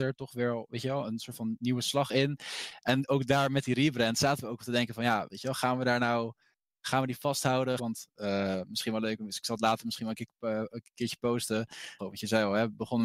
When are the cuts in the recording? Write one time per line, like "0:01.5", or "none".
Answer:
0:05.3
0:07.8
0:12.0

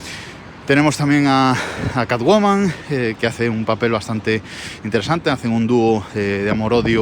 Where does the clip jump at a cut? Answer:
none

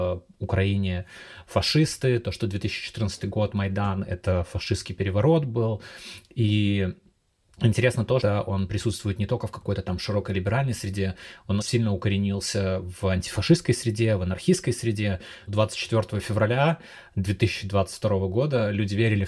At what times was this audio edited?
0:08.2
0:11.6
0:15.5

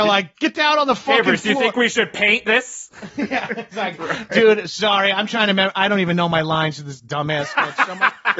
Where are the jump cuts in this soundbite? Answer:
none

